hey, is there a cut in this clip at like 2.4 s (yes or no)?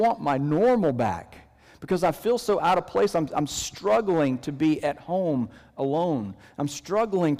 no